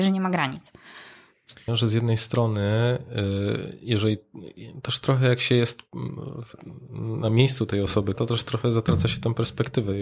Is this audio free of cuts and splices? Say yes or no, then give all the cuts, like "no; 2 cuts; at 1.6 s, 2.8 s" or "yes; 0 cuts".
no; 2 cuts; at 1.7 s, 8.1 s